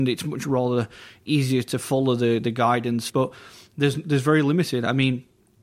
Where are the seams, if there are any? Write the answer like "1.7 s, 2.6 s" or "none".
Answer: 3.1 s